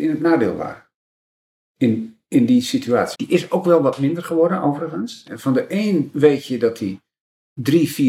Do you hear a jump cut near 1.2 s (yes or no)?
no